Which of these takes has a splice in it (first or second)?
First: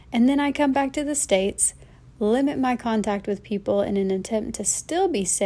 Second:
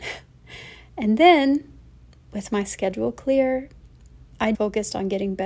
second